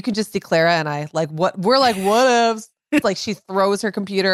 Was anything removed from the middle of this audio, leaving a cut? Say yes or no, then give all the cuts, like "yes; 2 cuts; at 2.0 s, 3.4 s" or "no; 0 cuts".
yes; 1 cut; at 3.0 s